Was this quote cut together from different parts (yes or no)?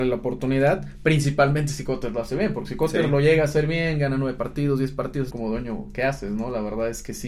yes